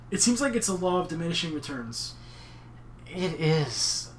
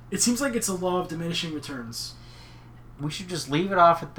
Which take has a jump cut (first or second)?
second